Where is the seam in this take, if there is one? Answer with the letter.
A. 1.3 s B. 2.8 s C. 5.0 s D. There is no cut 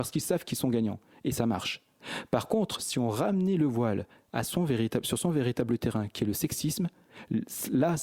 D